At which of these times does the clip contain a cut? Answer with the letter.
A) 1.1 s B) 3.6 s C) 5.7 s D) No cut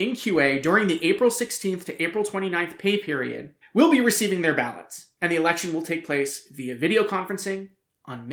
B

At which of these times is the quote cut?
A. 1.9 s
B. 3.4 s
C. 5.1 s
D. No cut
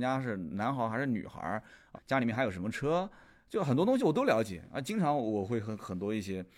A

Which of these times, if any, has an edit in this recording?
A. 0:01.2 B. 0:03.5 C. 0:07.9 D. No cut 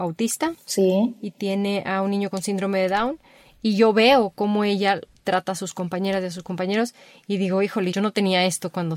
C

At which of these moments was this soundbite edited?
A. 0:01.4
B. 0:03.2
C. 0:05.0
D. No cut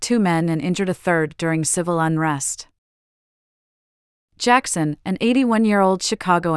D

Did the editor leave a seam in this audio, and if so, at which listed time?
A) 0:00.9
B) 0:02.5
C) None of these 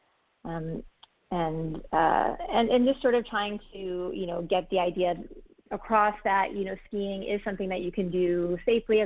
C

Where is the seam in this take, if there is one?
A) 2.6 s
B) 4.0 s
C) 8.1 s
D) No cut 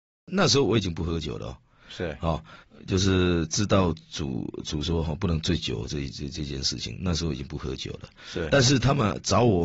A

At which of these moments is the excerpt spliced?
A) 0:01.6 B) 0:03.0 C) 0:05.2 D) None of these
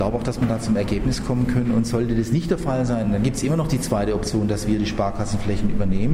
D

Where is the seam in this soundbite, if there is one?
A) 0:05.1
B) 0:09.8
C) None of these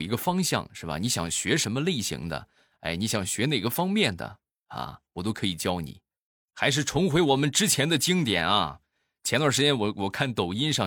C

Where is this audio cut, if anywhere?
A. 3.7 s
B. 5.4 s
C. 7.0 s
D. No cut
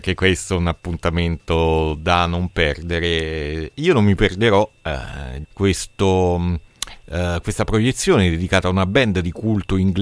B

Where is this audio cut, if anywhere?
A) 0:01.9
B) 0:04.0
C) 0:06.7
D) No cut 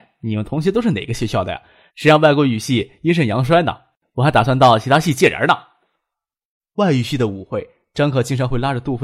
A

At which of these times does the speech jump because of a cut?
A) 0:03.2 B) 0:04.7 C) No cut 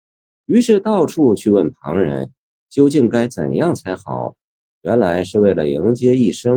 B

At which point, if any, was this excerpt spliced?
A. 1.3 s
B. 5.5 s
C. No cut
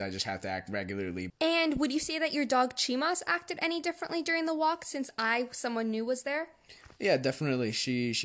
A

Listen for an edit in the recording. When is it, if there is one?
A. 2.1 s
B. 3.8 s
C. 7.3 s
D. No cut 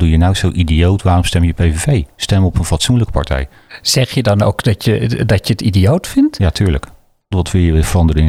C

